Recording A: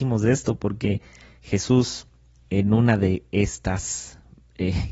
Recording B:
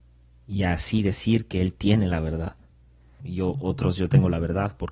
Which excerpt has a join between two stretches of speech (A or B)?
B